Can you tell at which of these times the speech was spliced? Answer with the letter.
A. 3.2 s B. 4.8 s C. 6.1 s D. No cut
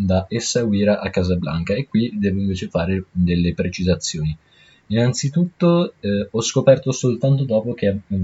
D